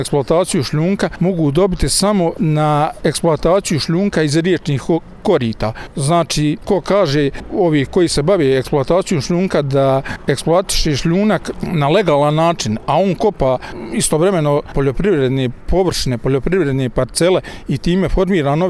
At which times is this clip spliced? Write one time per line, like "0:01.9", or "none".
0:06.6

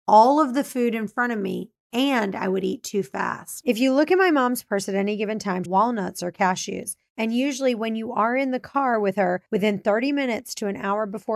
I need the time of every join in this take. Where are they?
0:05.7

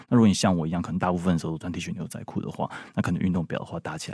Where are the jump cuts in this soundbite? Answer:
none

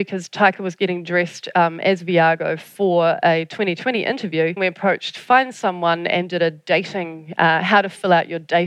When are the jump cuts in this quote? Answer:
0:04.6

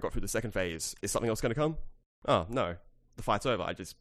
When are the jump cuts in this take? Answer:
0:01.0

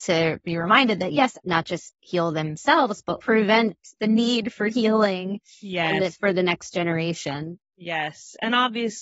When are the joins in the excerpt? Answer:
0:01.4

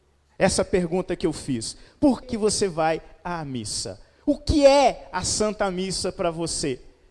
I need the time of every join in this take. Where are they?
0:02.2

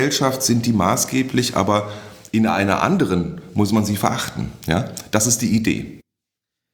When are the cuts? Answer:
none

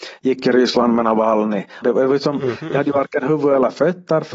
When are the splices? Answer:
0:01.8

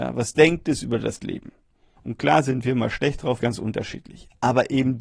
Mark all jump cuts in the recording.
0:02.0
0:03.4

